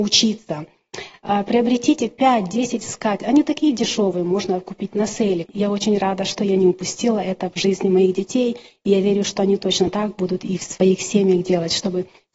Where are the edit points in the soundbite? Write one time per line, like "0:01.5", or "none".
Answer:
0:05.5